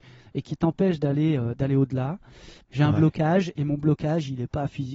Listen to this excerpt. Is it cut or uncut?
cut